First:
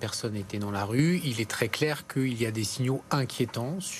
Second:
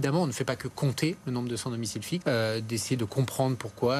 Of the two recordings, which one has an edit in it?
second; 1 cut; at 2.2 s

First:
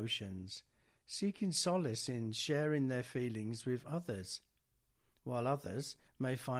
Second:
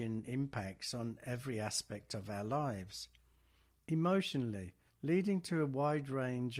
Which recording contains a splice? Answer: second; 1 cut; at 4.9 s

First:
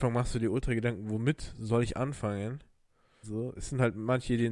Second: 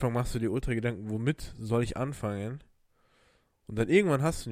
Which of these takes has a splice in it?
first; 1 cut; at 3.2 s

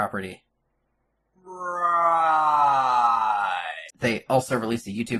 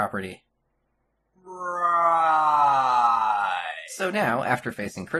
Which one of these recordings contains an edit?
first; 1 cut; at 3.9 s

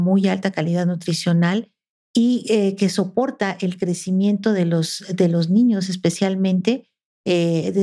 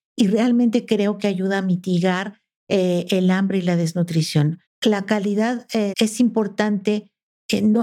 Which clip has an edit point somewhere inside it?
second; 2 cuts; at 4.7 s, 5.9 s

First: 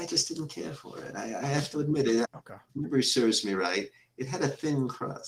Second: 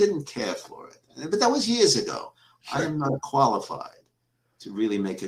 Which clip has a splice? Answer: first; 1 cut; at 2.2 s

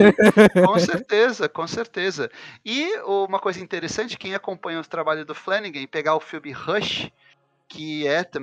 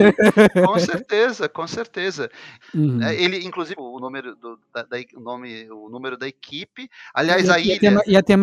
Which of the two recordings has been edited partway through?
second; 2 cuts; at 2.6 s, 3.8 s

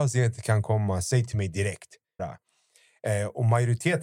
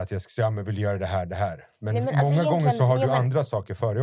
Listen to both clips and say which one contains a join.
first; 1 cut; at 2.2 s

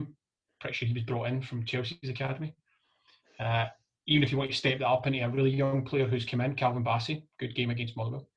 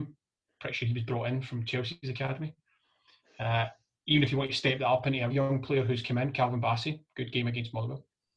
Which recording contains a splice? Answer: second; 1 cut; at 5.3 s

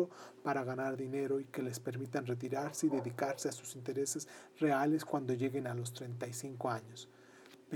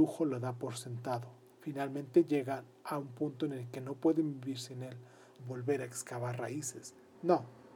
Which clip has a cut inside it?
second; 2 cuts; at 1.5 s, 5.4 s

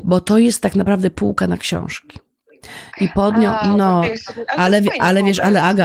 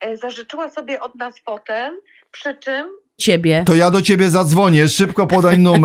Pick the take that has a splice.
second; 1 cut; at 3.2 s

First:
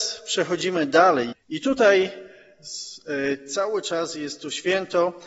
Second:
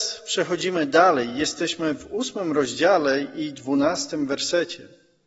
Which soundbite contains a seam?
first; 1 cut; at 1.3 s

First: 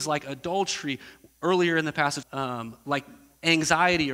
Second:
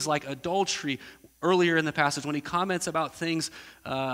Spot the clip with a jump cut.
first; 1 cut; at 2.2 s

